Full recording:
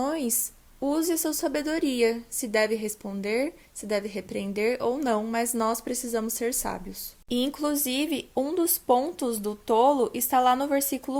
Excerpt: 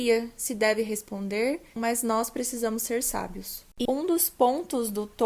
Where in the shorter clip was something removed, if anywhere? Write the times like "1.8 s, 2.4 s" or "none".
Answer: 1.8 s, 3.9 s